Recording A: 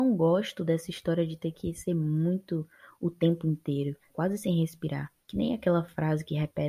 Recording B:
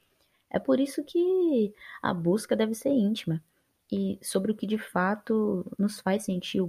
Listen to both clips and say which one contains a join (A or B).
A